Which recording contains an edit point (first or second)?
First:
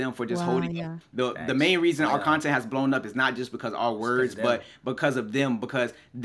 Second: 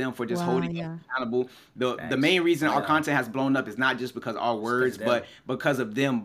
first